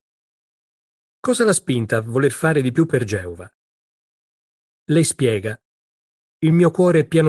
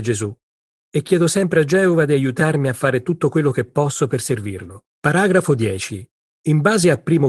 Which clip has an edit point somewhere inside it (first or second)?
second